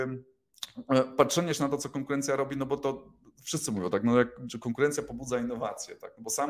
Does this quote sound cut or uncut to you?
uncut